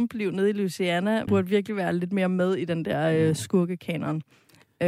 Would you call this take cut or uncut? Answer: cut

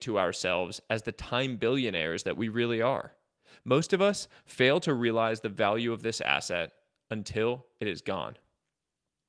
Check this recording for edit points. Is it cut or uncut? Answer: uncut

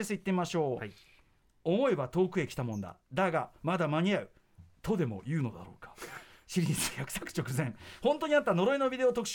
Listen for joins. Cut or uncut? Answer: uncut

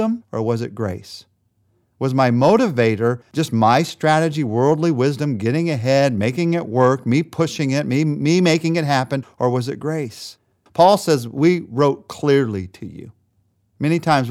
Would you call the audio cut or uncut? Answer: cut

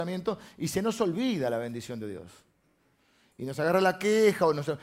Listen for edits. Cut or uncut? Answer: uncut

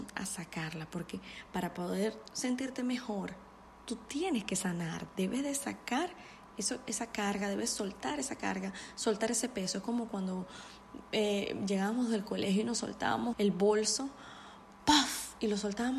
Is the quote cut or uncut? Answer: cut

